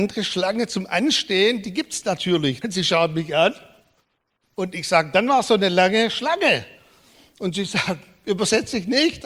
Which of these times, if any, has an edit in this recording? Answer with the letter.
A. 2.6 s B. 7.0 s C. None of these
A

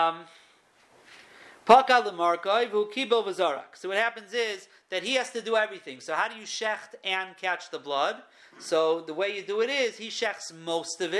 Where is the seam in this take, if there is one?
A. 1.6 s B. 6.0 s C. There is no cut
C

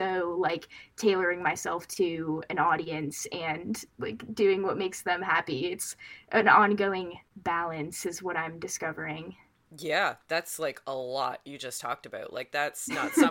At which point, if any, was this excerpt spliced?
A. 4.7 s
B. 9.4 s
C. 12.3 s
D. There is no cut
D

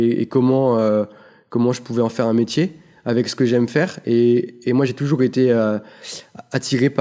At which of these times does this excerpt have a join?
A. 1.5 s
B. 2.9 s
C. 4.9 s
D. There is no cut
D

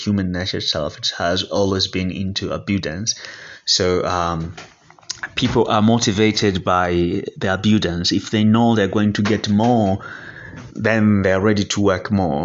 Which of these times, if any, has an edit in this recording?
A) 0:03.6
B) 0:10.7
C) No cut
B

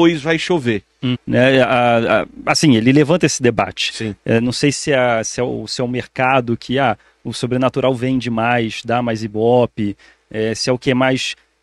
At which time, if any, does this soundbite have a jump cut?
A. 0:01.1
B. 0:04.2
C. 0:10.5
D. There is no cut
A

